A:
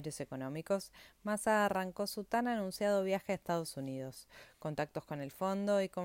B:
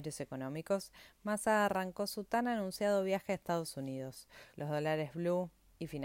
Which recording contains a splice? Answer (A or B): B